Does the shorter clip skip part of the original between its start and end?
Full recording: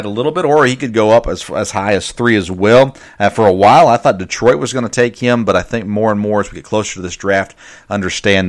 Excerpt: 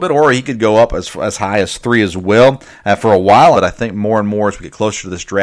yes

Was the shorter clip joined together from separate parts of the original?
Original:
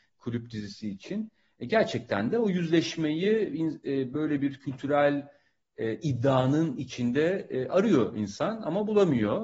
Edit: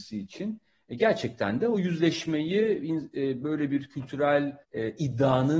yes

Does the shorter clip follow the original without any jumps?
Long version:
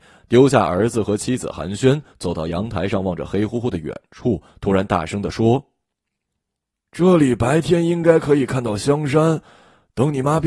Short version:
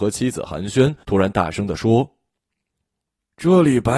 no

